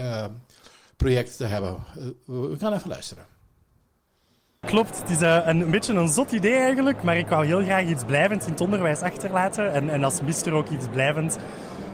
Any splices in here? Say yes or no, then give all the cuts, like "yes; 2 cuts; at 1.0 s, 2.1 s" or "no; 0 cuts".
no; 0 cuts